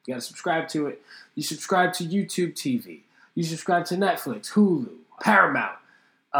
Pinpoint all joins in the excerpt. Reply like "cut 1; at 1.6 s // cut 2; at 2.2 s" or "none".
cut 1; at 3.3 s // cut 2; at 5.2 s